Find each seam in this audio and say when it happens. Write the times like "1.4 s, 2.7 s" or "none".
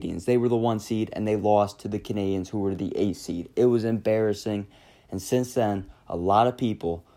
none